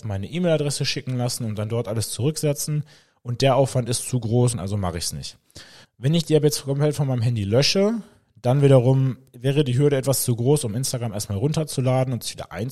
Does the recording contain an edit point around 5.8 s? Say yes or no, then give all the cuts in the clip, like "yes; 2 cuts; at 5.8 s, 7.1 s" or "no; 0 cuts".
yes; 2 cuts; at 4.5 s, 5.8 s